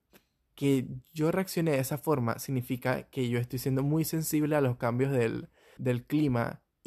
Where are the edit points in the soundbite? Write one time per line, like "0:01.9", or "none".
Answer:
0:05.8